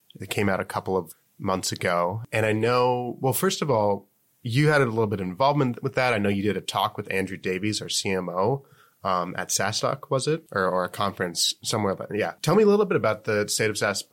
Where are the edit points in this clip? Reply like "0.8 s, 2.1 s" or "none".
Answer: none